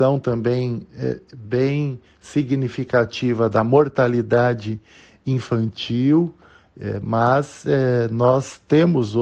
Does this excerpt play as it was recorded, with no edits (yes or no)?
yes